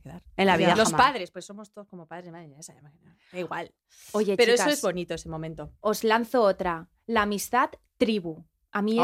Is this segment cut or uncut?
uncut